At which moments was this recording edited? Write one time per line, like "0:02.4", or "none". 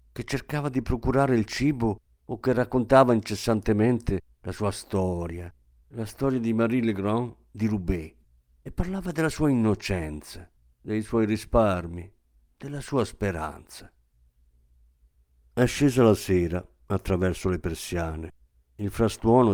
none